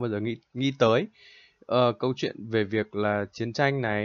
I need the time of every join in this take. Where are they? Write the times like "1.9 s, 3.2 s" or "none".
none